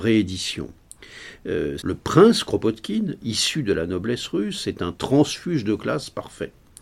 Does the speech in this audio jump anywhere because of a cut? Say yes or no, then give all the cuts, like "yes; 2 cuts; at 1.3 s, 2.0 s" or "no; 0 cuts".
yes; 1 cut; at 1.8 s